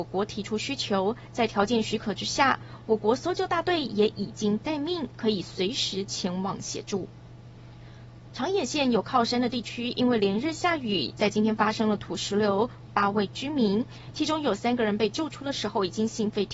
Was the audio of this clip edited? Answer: yes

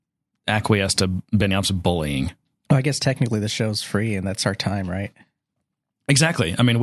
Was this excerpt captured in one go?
yes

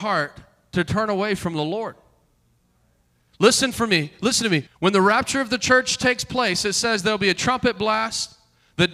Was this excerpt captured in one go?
no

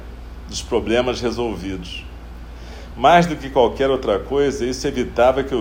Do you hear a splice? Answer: no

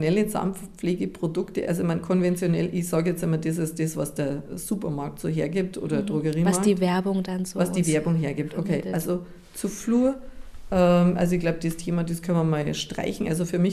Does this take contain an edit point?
no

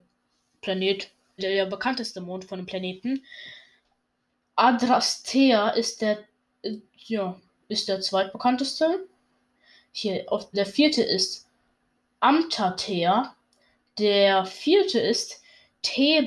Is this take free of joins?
no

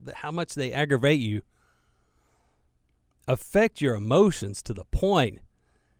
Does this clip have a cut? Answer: no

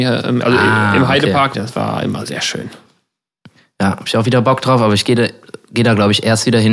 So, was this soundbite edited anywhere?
yes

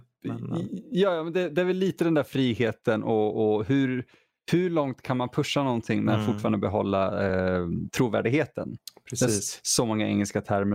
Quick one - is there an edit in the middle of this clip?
no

